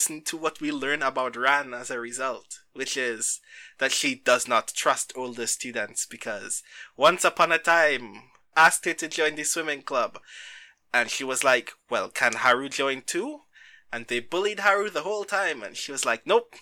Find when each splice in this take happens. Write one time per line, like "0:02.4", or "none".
0:08.5